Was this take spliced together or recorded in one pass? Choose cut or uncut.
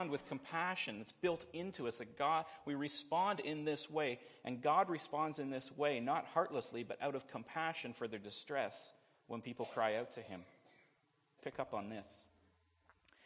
cut